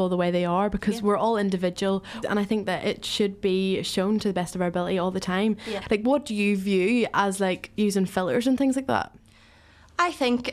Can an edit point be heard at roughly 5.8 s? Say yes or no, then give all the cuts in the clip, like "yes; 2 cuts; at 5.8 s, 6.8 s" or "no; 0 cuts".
yes; 2 cuts; at 2.2 s, 5.8 s